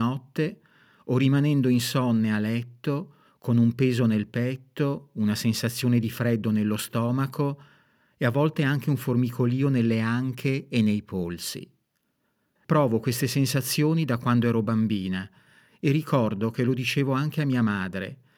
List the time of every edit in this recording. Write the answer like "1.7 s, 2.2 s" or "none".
12.6 s